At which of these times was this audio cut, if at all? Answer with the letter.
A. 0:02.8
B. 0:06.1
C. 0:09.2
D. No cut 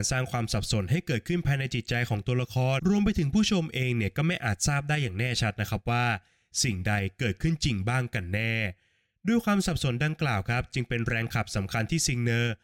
A